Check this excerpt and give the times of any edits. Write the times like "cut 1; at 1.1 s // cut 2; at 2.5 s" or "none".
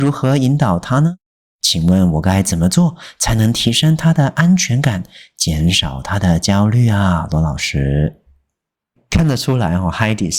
none